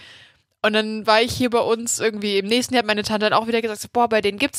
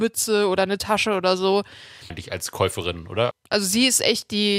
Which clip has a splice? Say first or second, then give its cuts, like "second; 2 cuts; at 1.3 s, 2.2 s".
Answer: second; 2 cuts; at 2.1 s, 3.3 s